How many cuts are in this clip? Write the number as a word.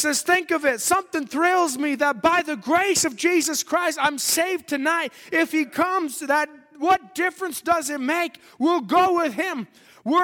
zero